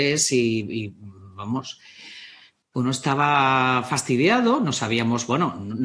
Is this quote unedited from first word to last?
no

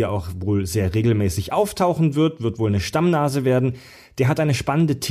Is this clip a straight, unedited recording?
yes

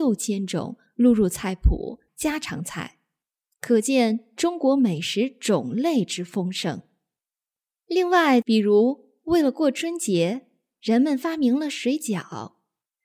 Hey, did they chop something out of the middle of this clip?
yes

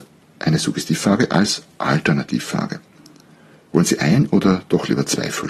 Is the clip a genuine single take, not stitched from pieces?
yes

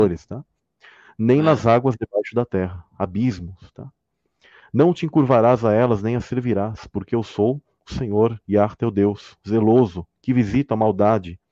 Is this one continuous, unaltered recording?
yes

